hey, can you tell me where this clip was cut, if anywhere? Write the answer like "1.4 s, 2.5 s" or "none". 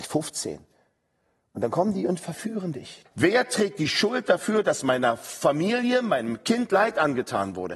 3.1 s